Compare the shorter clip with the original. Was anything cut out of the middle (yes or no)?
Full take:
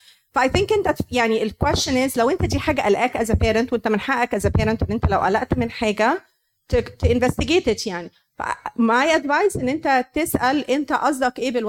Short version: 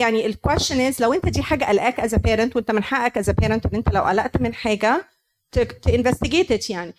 no